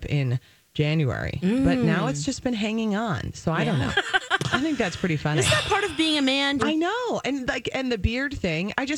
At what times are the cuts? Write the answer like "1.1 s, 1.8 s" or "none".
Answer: 3.9 s, 6.6 s